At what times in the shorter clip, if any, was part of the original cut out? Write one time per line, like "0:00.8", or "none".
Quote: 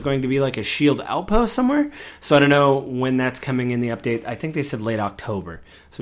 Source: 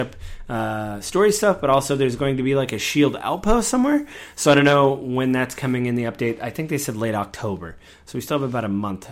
none